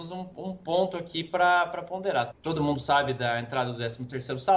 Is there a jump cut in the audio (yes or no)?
yes